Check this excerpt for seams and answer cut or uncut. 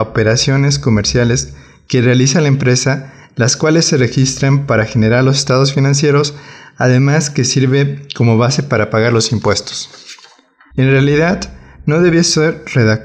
cut